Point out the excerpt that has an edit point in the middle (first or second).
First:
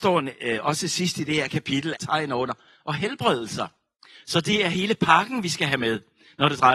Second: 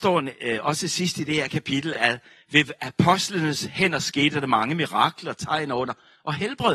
first